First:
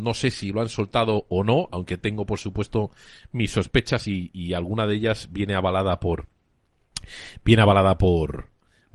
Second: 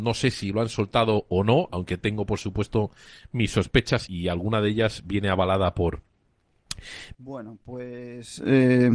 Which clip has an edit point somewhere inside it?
second; 2 cuts; at 4.1 s, 7.1 s

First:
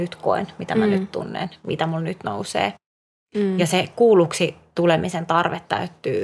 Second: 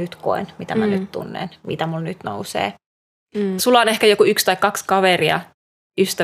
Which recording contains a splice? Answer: second; 1 cut; at 3.6 s

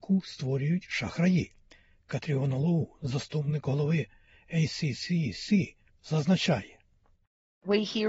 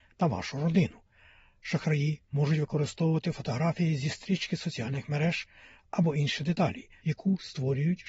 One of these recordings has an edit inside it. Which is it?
second; 1 cut; at 7.0 s

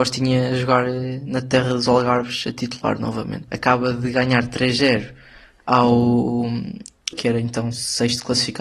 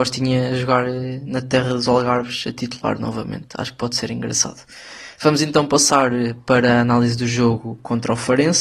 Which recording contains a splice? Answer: first; 2 cuts; at 3.5 s, 7.1 s

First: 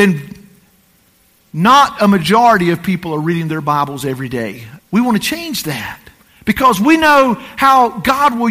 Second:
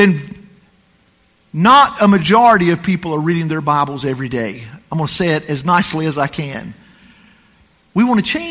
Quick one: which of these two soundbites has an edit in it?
first; 1 cut; at 4.8 s

